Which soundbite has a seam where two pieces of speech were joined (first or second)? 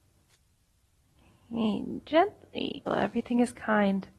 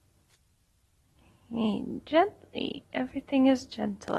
first